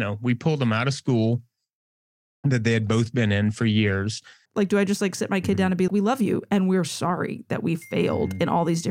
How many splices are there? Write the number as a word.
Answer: two